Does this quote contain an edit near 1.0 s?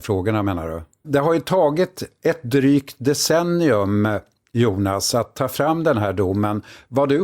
yes; 1 cut; at 1.0 s

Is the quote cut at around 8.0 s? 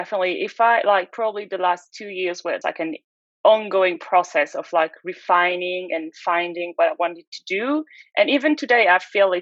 no; 1 cut; at 2.6 s

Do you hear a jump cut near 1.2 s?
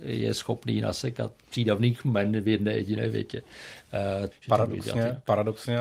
no; 1 cut; at 4.3 s

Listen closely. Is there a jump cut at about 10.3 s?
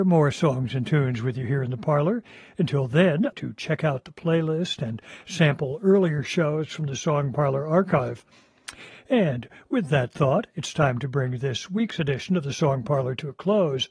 no; 2 cuts; at 3.3 s, 8.9 s

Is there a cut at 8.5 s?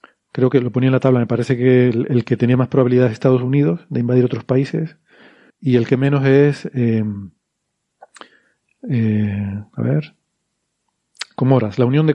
no; 1 cut; at 5.5 s

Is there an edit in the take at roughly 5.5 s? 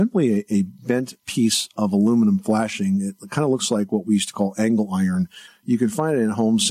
yes; 1 cut; at 5.5 s

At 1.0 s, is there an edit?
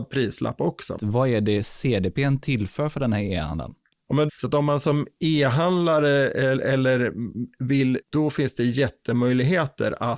yes; 3 cuts; at 1.0 s, 4.3 s, 8.0 s

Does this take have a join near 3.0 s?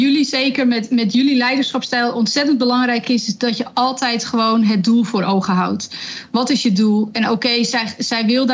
no; 0 cuts

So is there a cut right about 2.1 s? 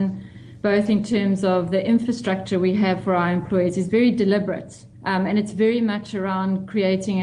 no; 1 cut; at 4.9 s

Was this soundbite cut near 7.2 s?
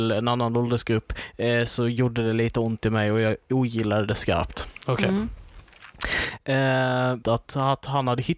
yes; 1 cut; at 7.2 s

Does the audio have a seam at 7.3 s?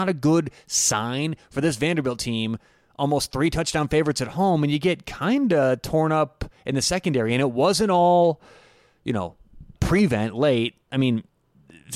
no; 1 cut; at 9.8 s

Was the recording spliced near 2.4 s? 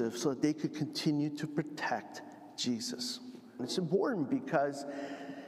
no; 1 cut; at 3.6 s

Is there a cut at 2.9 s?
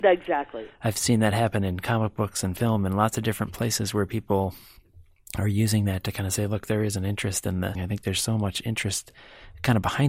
no; 1 cut; at 7.7 s

